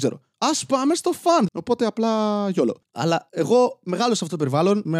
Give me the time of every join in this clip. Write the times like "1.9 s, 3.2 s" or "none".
1.5 s, 2.8 s